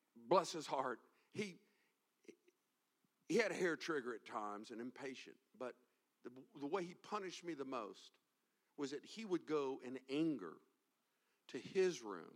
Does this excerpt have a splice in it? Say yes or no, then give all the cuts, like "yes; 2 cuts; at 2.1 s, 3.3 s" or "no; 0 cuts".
no; 0 cuts